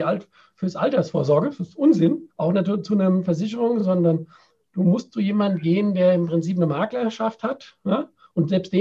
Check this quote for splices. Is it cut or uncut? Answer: uncut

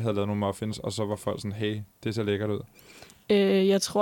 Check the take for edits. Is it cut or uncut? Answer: uncut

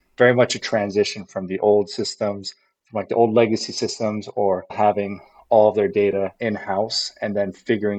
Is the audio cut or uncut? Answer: uncut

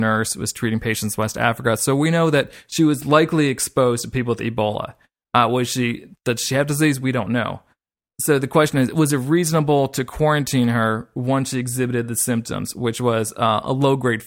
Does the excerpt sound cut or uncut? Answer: uncut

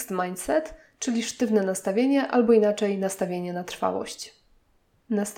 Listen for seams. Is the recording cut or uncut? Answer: uncut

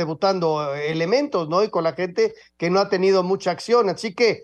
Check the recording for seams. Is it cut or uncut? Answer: uncut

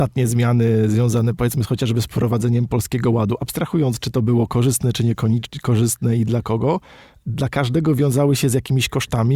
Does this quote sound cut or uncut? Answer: uncut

